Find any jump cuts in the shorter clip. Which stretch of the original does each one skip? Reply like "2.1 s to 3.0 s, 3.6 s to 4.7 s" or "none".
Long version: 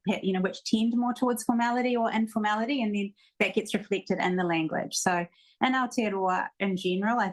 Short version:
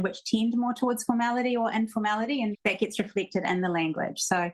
2.9 s to 3.3 s